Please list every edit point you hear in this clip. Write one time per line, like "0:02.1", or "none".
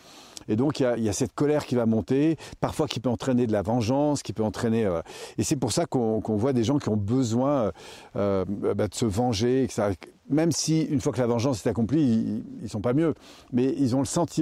0:01.0

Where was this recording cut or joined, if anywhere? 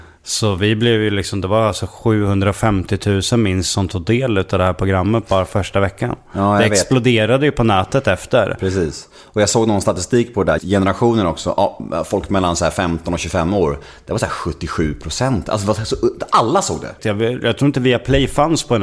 0:10.6
0:17.0

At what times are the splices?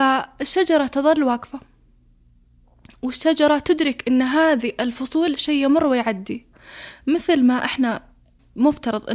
none

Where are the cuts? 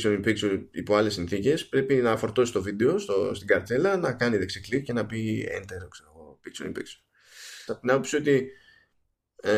0:07.7

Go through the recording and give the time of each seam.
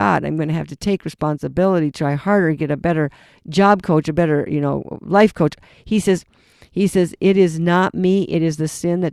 none

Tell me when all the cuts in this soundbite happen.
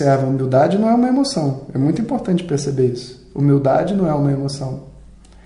none

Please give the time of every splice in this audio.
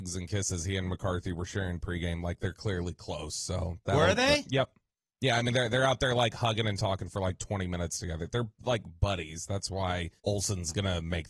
0:10.2

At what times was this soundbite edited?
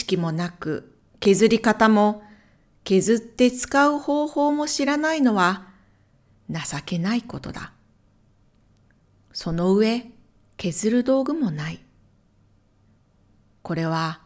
none

